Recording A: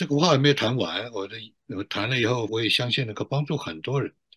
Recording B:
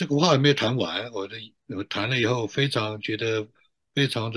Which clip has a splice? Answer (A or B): A